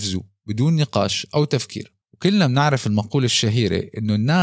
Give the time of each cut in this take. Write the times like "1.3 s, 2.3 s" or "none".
2.0 s